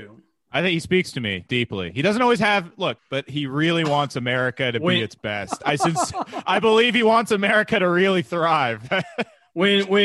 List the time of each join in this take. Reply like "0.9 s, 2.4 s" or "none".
3.0 s

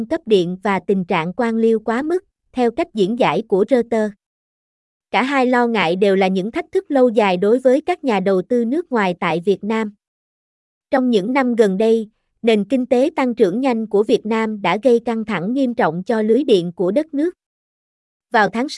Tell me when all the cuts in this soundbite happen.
none

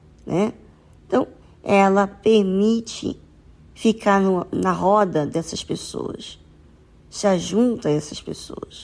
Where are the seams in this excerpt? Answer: 1.4 s

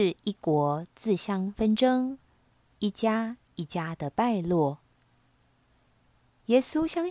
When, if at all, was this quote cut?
2.6 s

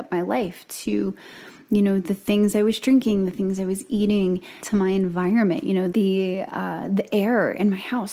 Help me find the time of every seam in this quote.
4.6 s, 5.9 s

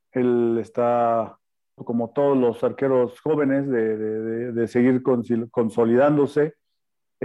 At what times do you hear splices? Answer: 1.8 s

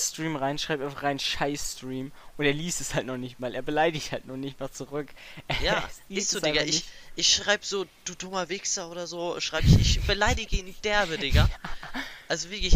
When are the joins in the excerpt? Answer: none

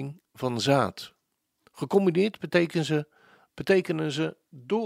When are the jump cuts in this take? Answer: none

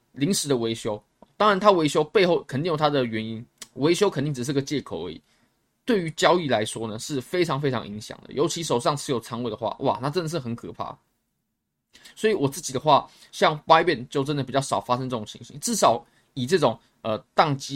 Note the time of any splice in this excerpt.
12.0 s

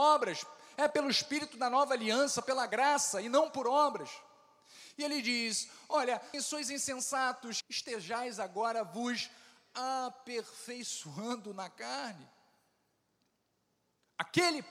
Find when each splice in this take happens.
6.3 s, 7.6 s

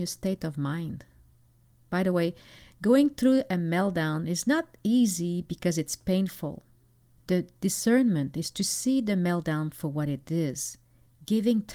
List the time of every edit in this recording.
7.2 s

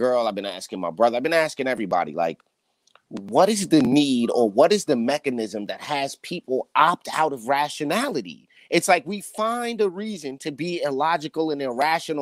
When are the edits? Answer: none

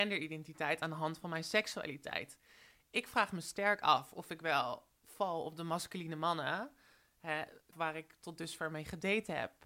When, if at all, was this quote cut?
7.7 s

